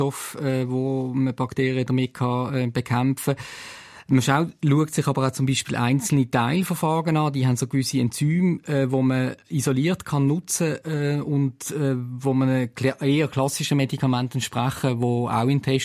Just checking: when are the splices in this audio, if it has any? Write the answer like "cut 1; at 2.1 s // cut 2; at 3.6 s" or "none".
none